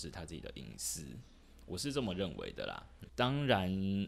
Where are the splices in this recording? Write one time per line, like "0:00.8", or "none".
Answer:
0:03.1